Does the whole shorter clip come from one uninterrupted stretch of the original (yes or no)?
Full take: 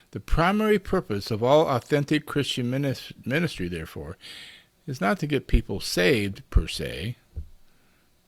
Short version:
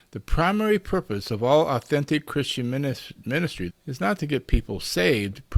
no